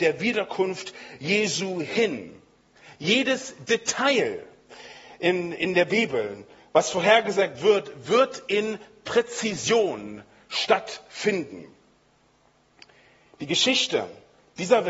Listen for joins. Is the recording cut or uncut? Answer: uncut